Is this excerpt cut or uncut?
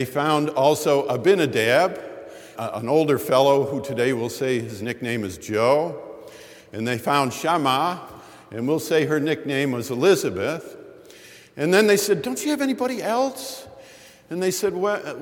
cut